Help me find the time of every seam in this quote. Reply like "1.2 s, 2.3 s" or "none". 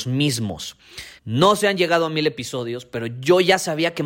1.2 s

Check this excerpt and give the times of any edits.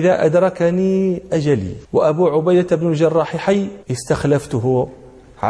1.8 s, 3.8 s

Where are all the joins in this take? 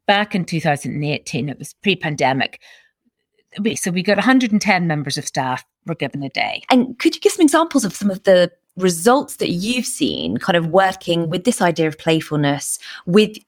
6.7 s

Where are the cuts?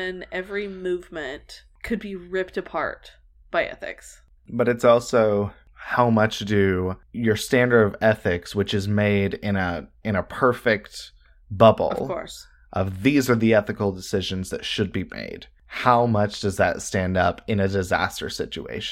4.4 s

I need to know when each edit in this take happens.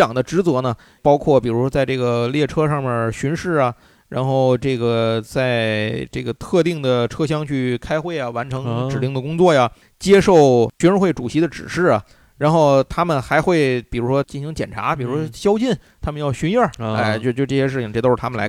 none

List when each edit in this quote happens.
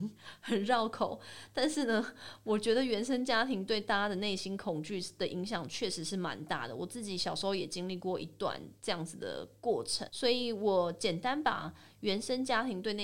10.1 s

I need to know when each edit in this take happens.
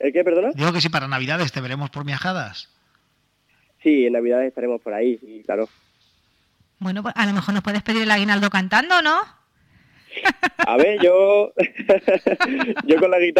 none

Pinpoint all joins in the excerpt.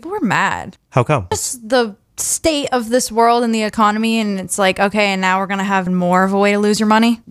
1.3 s, 5.9 s

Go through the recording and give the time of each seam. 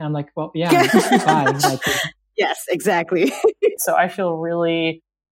3.8 s

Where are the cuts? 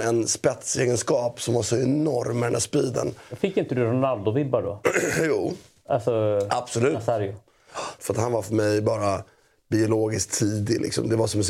8.0 s

